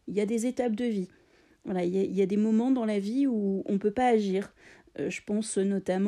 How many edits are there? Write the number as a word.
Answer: zero